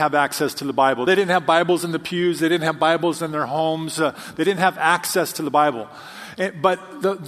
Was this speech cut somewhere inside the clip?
no; 0 cuts

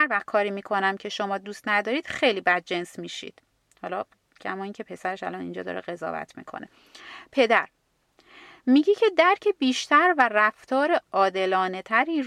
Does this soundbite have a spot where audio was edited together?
no; 0 cuts

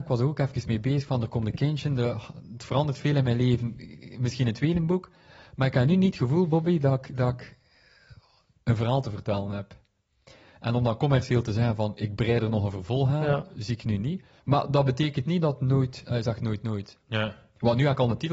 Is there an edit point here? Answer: no; 0 cuts

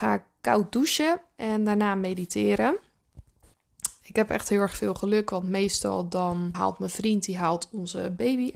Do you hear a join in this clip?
yes; 1 cut; at 6.5 s

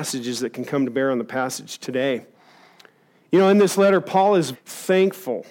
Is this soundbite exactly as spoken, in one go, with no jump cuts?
no; 1 cut; at 4.5 s

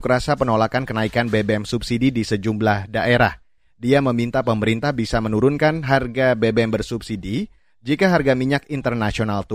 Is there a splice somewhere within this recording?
no; 0 cuts

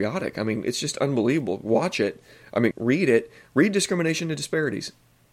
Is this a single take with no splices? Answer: no; 1 cut; at 2.7 s

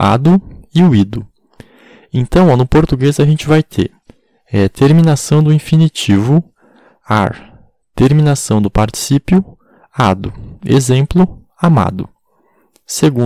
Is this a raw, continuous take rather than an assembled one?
yes; 0 cuts

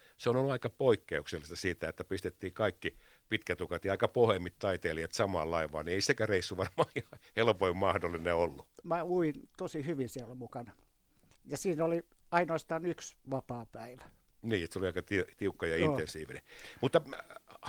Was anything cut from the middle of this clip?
yes; 1 cut; at 8.8 s

